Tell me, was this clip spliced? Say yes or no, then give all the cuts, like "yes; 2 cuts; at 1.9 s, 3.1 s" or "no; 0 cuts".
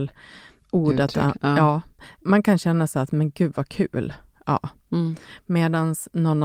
no; 0 cuts